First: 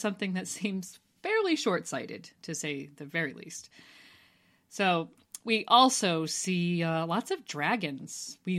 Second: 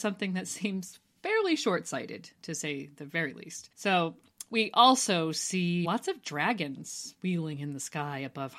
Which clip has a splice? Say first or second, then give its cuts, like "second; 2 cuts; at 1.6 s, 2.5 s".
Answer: second; 2 cuts; at 3.7 s, 5.8 s